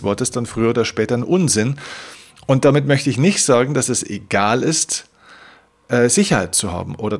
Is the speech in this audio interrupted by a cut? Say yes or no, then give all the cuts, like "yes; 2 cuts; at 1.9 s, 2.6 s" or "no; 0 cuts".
no; 0 cuts